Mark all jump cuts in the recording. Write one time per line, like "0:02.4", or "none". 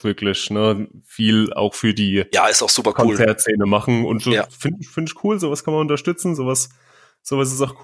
none

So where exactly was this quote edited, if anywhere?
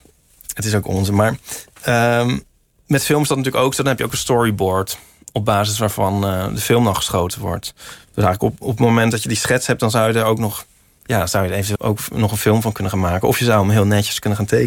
0:11.7

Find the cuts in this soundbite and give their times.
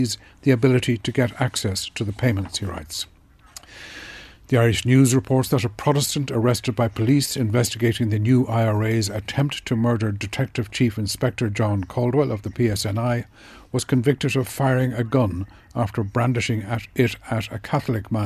none

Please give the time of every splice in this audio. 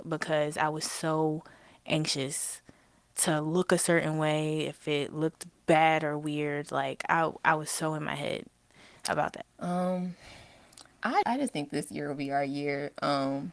0:09.4
0:11.2

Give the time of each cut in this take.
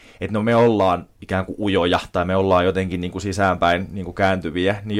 0:01.1

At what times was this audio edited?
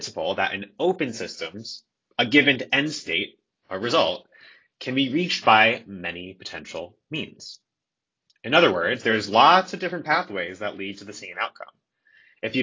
none

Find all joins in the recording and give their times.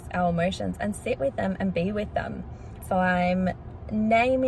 0:02.8

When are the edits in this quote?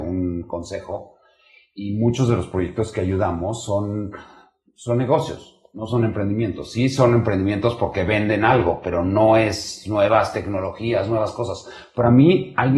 none

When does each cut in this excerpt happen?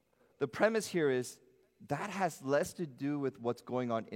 none

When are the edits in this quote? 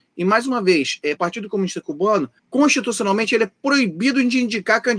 0:01.2
0:02.4

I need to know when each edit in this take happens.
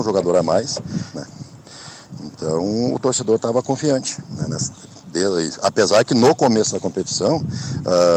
0:01.1

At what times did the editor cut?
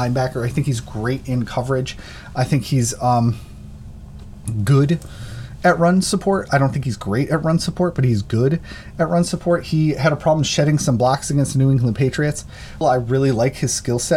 0:12.8

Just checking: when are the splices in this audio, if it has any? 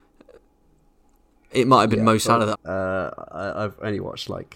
0:02.5

